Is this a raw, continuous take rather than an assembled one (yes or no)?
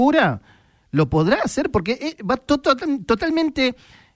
yes